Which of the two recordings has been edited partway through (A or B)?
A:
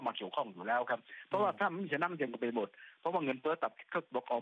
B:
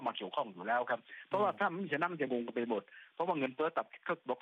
A